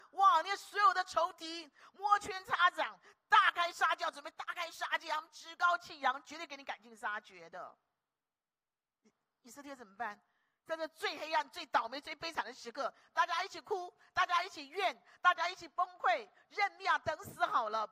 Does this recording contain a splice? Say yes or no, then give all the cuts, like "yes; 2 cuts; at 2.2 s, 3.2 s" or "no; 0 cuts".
no; 0 cuts